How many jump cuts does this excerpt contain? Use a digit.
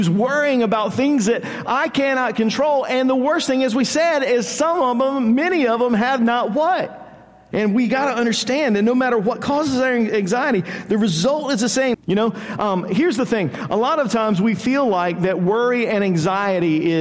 2